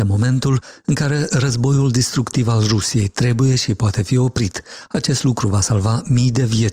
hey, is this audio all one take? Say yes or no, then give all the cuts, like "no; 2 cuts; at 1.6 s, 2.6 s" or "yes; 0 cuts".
yes; 0 cuts